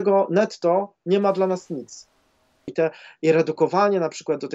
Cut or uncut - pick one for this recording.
cut